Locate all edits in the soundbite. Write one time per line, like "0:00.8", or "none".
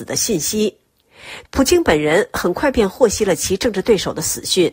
0:01.4